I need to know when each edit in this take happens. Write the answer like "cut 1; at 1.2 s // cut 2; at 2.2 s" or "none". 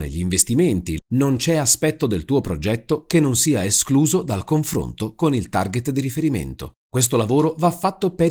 cut 1; at 1.0 s // cut 2; at 6.8 s